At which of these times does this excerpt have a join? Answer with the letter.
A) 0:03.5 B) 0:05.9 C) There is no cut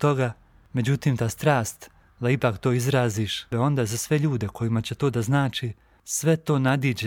A